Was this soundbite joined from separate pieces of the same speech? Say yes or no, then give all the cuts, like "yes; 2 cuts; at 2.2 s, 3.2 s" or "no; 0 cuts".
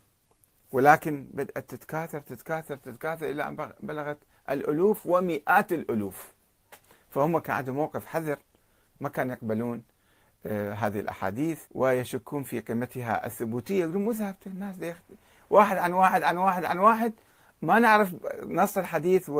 yes; 1 cut; at 11.7 s